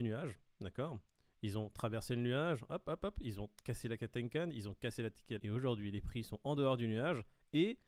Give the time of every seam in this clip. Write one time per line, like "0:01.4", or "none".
0:05.4